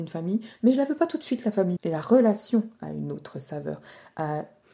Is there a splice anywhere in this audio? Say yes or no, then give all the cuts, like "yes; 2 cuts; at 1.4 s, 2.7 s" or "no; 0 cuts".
yes; 1 cut; at 1.8 s